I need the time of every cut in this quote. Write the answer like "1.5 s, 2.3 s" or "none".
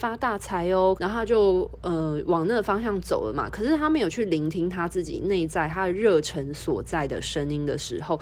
1.0 s